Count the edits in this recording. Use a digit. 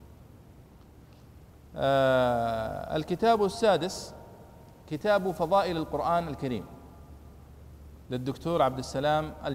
1